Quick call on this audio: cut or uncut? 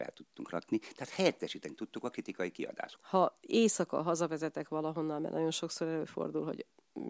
cut